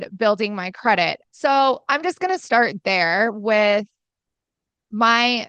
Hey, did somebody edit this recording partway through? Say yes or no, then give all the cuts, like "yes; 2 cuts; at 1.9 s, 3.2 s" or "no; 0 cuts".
yes; 1 cut; at 1.2 s